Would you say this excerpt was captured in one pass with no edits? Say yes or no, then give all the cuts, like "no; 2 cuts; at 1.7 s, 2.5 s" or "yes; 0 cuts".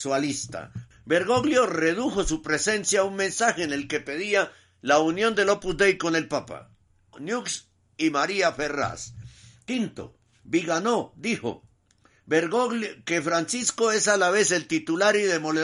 no; 2 cuts; at 0.9 s, 7.1 s